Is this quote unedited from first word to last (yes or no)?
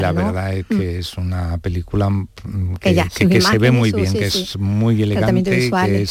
yes